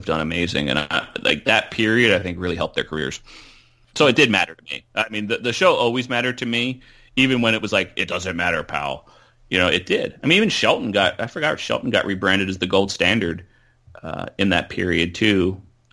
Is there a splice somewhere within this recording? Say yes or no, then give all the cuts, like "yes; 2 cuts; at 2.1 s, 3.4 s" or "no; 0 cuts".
no; 0 cuts